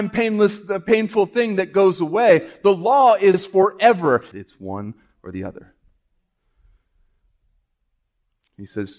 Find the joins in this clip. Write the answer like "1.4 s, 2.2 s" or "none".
4.3 s